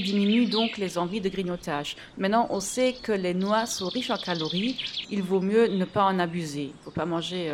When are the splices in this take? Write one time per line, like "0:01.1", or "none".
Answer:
0:02.1
0:05.0